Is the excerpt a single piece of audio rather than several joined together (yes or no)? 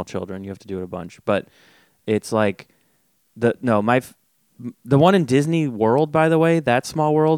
yes